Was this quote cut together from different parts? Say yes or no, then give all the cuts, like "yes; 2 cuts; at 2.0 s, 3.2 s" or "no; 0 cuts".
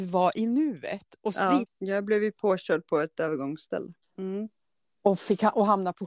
yes; 2 cuts; at 1.6 s, 4.0 s